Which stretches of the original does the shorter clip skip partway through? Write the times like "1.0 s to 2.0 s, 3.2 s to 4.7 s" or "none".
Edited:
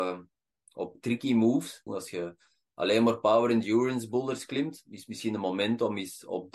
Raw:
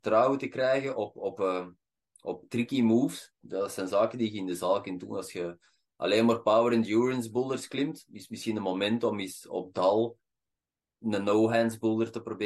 3.3 s to 5.1 s